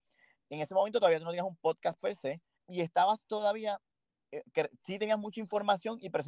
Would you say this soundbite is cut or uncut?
cut